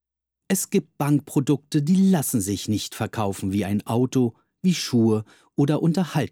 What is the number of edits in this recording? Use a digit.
0